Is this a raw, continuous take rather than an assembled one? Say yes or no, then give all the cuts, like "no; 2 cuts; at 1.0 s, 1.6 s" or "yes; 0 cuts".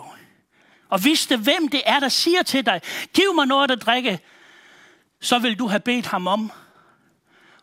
yes; 0 cuts